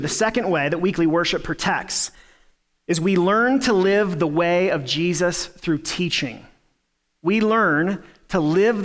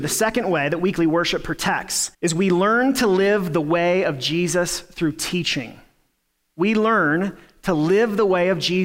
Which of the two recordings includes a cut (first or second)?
second